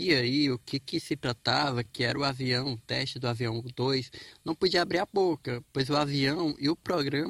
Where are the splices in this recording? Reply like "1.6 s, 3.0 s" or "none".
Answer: none